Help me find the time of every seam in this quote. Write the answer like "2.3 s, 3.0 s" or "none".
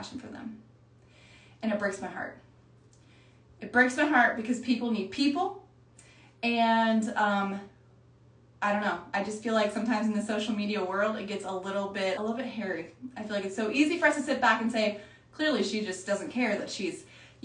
12.2 s